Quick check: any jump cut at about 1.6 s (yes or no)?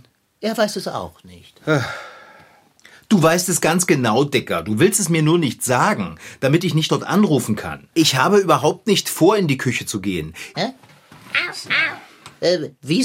no